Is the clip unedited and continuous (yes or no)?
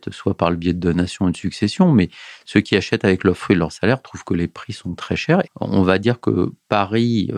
no